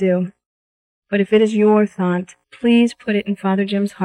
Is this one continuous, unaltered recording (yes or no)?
no